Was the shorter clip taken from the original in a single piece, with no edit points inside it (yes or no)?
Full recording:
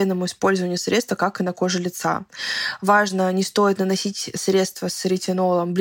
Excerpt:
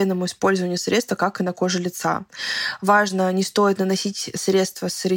yes